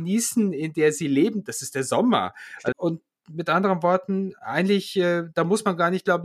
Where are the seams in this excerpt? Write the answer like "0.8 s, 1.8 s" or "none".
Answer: 2.7 s